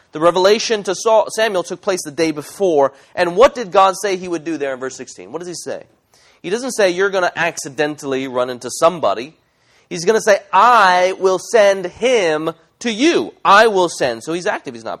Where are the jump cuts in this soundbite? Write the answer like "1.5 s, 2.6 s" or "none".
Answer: none